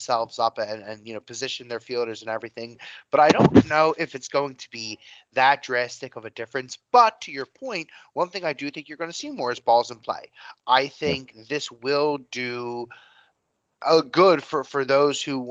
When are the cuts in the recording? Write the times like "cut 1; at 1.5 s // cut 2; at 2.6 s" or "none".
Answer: none